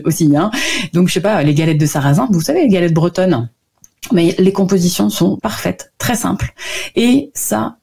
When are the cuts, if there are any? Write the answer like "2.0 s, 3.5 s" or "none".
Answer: 2.3 s, 5.4 s